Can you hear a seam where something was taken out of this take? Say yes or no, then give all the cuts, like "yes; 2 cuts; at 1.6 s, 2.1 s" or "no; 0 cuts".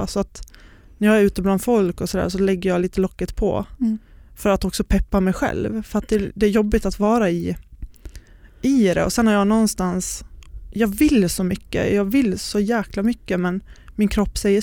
no; 0 cuts